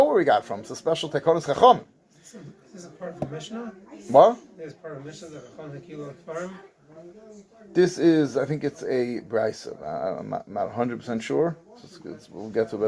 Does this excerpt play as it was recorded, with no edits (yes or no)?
yes